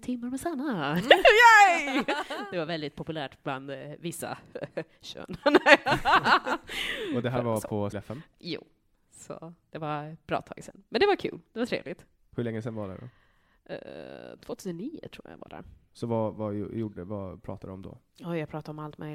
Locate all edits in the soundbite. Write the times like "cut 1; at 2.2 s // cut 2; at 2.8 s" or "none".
cut 1; at 7.9 s